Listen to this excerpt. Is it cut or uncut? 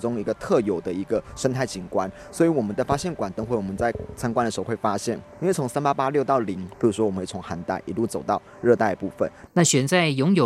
cut